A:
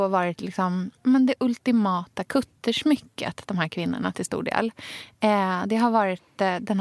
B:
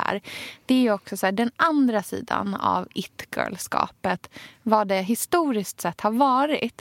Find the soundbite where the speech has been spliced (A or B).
A